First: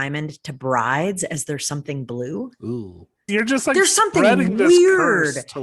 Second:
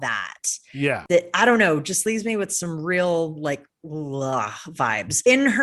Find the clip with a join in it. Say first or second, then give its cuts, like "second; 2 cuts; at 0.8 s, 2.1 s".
first; 1 cut; at 3.3 s